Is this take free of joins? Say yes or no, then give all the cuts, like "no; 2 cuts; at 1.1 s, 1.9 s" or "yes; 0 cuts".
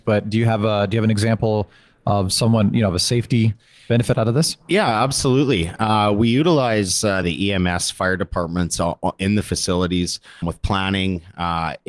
no; 2 cuts; at 7.2 s, 10.4 s